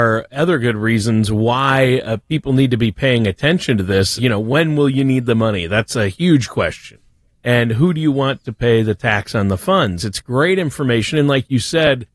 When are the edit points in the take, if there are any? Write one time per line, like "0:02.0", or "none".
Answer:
0:04.2
0:10.0